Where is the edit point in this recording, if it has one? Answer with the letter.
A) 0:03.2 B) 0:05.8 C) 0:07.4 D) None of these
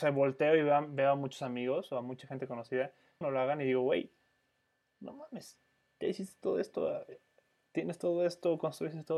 A